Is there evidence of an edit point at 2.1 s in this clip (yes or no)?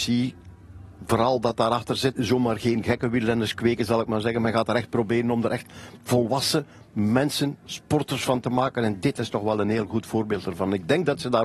yes